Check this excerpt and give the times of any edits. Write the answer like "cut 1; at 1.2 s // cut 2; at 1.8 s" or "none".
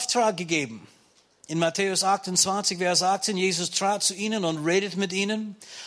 none